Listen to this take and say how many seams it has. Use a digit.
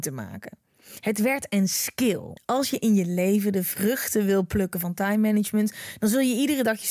1